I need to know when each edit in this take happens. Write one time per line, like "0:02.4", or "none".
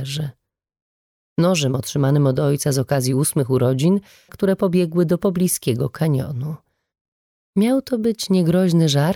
0:04.3